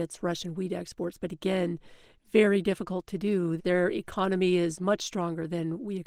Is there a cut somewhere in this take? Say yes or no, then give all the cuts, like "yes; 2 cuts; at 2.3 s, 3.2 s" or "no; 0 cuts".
yes; 1 cut; at 3.6 s